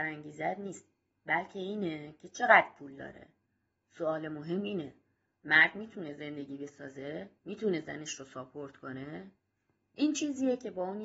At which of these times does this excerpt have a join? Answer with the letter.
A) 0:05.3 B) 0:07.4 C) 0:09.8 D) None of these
B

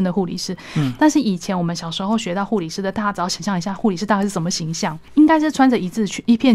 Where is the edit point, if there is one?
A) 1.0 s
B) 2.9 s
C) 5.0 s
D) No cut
D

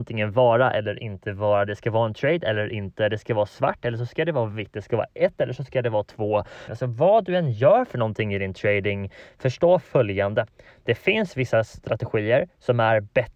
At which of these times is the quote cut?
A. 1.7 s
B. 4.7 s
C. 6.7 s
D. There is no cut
C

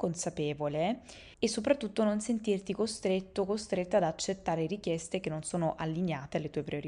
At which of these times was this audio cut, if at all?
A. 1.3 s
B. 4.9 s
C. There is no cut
A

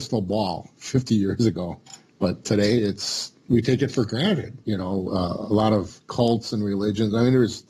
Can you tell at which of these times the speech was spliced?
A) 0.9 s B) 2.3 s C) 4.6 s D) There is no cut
C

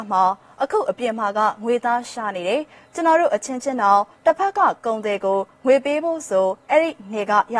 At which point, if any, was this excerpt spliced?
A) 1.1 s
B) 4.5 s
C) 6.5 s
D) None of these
D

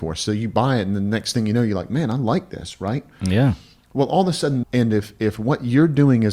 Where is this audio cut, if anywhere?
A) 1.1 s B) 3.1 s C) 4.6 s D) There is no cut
C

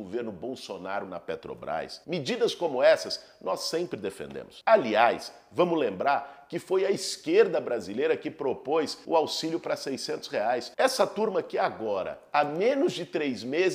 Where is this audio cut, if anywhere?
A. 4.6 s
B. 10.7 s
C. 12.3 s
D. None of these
B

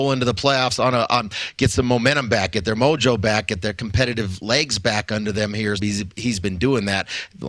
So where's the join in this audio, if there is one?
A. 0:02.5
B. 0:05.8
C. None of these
B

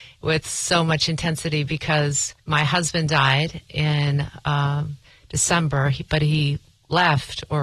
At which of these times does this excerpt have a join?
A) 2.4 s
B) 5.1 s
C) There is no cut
A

